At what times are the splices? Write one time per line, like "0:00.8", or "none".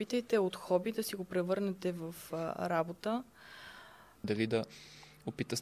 0:04.2